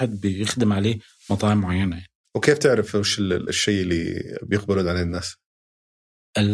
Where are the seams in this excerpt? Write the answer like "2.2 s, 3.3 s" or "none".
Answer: none